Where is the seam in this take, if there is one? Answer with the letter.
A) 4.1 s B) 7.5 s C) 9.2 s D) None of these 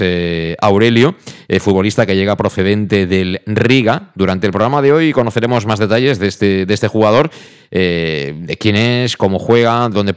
D